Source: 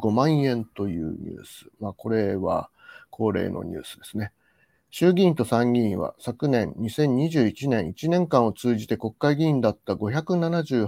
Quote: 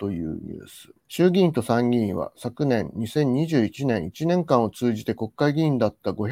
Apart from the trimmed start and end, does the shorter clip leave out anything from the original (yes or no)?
yes